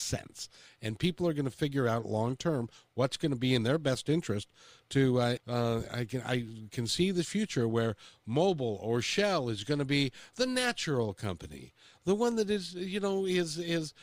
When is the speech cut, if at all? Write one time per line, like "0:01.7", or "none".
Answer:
0:05.4